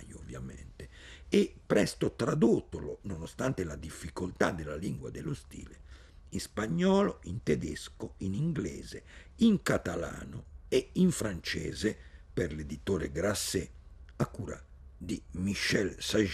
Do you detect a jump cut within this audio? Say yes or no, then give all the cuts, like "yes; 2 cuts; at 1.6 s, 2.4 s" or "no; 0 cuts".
no; 0 cuts